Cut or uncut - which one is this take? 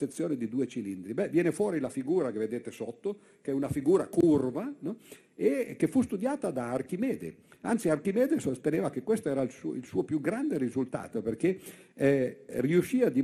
uncut